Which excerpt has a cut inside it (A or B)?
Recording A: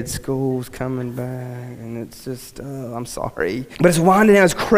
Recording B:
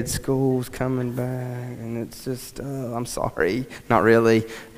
A